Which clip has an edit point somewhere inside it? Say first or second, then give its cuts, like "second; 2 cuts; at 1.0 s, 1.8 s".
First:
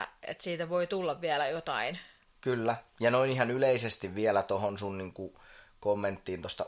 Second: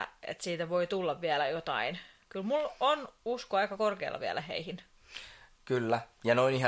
first; 1 cut; at 2.3 s